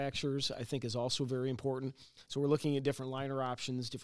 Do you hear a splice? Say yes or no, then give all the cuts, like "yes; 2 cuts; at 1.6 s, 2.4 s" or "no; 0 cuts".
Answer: no; 0 cuts